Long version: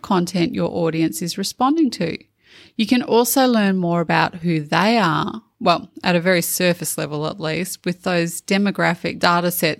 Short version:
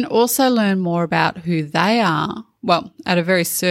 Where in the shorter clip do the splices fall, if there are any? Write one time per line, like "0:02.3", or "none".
none